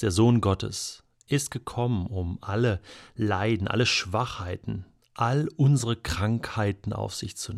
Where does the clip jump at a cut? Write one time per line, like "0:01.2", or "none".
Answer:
none